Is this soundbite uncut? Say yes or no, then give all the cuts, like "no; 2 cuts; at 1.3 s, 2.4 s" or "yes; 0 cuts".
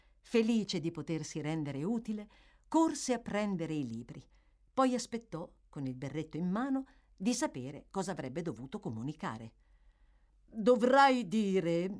yes; 0 cuts